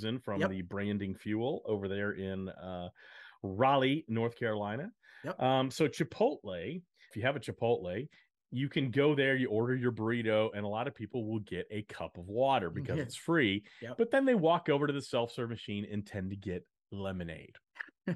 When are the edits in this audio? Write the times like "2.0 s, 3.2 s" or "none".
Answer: 7.1 s